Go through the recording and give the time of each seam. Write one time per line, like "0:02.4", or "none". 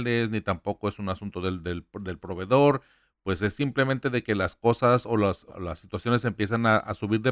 0:05.5